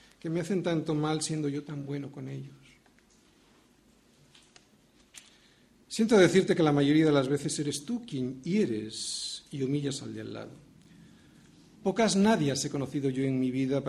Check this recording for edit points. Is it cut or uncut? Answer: uncut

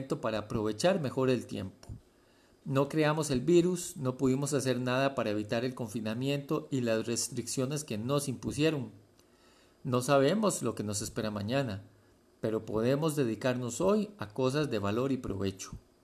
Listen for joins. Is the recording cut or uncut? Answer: uncut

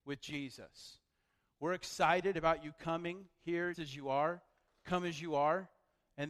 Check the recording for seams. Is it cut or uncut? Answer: cut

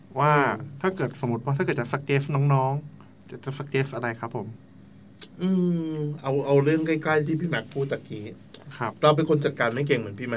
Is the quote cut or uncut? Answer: cut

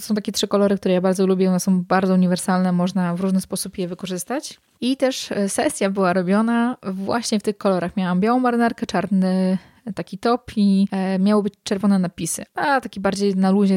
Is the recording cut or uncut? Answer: cut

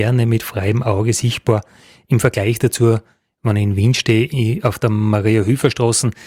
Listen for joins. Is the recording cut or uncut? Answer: uncut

